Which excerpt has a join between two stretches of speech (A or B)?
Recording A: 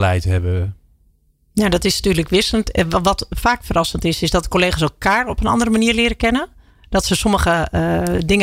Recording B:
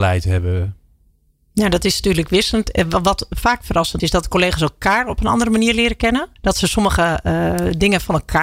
B